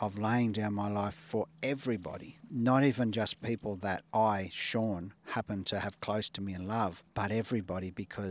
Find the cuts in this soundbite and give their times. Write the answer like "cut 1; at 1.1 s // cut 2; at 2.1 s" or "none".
none